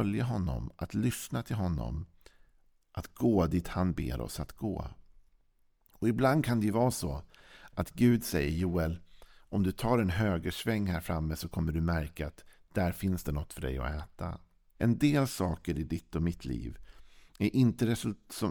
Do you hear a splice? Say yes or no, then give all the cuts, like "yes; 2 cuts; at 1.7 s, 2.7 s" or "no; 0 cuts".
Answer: yes; 1 cut; at 14.8 s